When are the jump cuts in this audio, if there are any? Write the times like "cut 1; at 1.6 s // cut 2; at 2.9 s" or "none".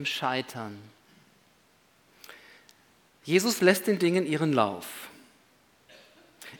none